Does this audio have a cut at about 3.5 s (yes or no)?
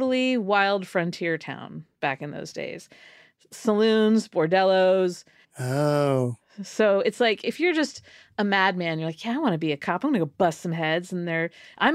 no